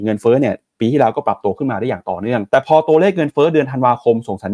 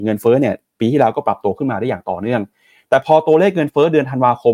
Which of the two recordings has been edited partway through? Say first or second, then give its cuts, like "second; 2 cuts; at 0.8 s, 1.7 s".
first; 1 cut; at 2.5 s